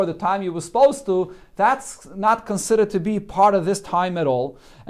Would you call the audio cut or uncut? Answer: uncut